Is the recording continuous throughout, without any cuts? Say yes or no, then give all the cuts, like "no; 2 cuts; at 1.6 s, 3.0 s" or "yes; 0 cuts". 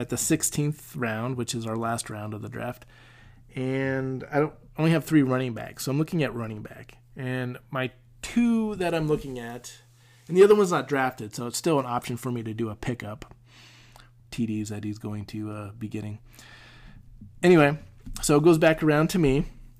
no; 1 cut; at 14.2 s